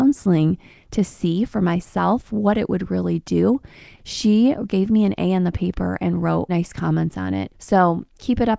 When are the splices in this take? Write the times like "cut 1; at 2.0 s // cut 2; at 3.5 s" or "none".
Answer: cut 1; at 4.0 s // cut 2; at 6.5 s // cut 3; at 7.5 s